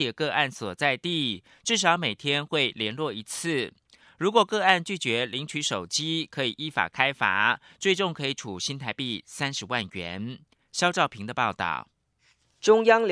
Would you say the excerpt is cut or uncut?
uncut